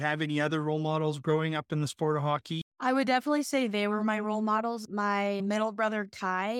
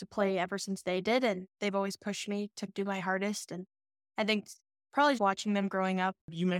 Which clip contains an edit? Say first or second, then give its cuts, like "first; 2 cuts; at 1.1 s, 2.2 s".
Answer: second; 1 cut; at 5.2 s